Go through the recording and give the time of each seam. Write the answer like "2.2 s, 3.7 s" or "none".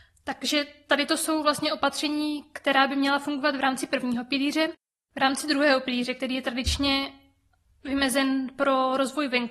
none